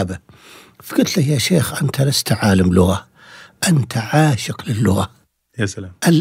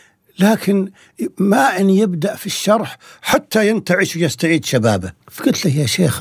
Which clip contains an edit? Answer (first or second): second